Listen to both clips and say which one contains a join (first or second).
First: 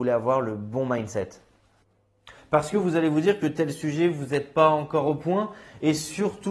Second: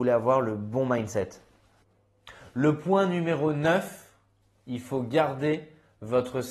first